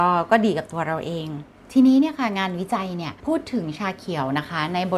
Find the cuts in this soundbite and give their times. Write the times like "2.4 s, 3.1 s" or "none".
3.2 s